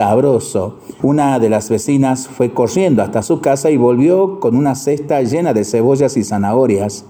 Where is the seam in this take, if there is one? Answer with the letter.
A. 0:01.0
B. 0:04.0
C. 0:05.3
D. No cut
A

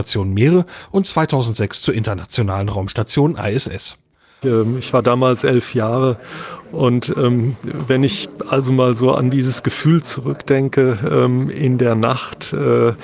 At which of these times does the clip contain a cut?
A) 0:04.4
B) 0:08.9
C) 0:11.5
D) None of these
A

